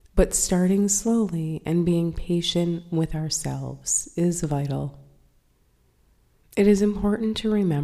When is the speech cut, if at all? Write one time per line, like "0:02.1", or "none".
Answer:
0:06.4